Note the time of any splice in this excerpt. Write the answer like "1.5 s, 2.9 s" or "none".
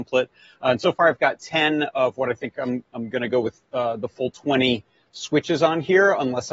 none